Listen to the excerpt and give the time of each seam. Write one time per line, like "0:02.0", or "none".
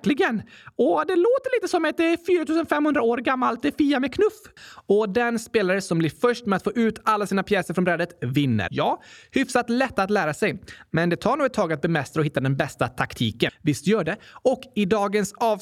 0:04.6
0:08.7
0:13.5